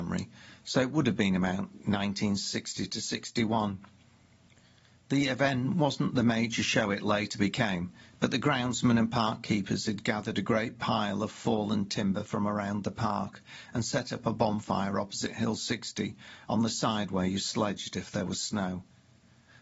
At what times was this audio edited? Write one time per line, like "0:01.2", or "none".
none